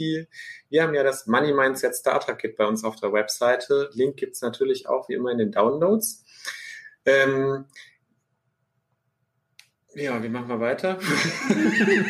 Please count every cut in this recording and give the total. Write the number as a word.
zero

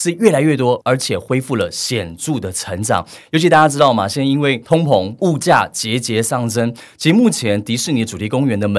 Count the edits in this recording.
zero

